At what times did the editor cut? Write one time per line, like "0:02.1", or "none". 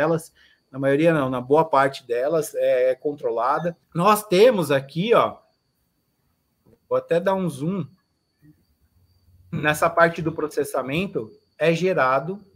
0:03.8